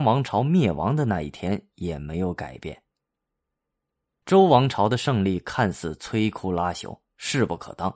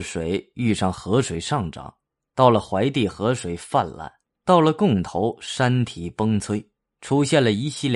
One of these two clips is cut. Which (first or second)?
first